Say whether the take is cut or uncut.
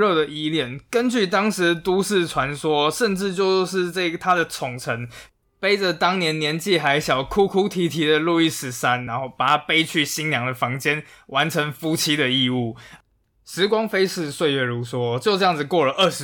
uncut